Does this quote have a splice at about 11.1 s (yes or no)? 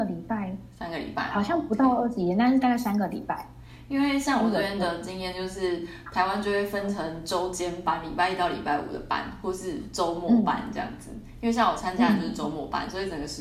no